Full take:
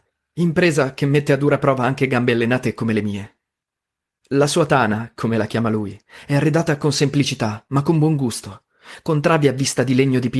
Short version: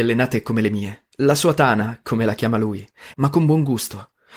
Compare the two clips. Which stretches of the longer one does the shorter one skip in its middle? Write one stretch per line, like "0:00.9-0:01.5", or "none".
0:03.4-0:04.2
0:06.3-0:07.7